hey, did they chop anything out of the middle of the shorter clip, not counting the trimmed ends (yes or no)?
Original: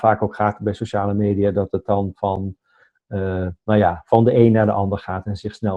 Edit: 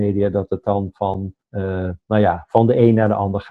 yes